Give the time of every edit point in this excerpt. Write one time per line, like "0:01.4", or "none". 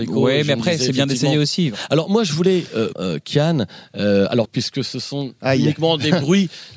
0:02.9
0:04.4